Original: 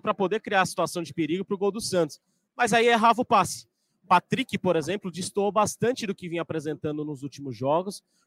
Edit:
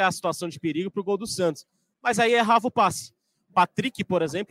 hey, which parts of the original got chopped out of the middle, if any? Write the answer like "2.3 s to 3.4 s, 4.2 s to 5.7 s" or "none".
none